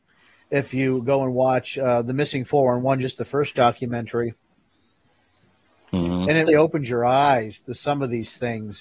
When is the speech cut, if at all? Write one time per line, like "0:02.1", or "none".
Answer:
0:06.5